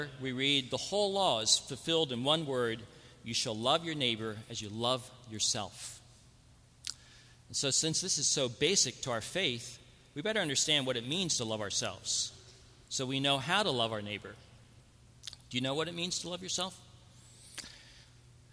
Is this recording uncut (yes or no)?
yes